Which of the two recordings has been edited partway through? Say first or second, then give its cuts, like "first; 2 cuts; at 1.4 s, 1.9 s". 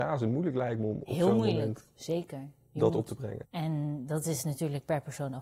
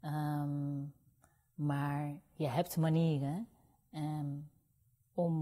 first; 1 cut; at 3.4 s